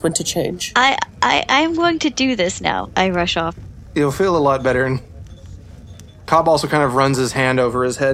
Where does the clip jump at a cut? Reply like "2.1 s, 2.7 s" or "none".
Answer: 2.9 s